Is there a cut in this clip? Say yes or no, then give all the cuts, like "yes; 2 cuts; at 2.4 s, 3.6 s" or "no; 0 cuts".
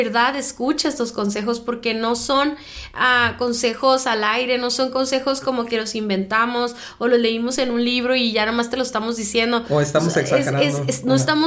no; 0 cuts